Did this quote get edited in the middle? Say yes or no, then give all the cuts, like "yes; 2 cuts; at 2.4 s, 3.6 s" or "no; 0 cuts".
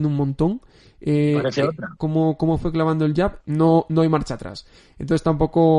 yes; 2 cuts; at 2.0 s, 3.4 s